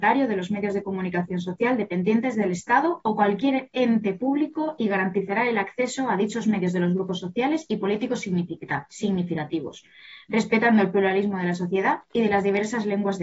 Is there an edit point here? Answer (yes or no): no